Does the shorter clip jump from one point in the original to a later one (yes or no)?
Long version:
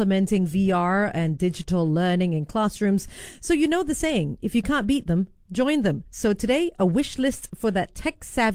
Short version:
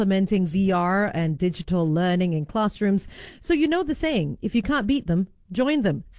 no